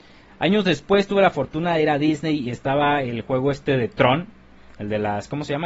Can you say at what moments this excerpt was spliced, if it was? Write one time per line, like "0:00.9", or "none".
none